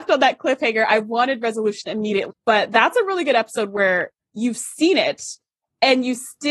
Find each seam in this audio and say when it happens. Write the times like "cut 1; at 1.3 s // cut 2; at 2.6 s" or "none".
cut 1; at 2.3 s